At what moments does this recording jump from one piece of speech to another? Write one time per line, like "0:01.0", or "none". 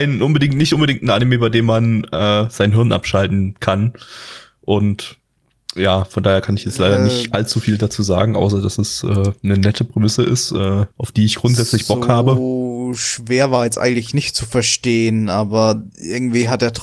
0:10.9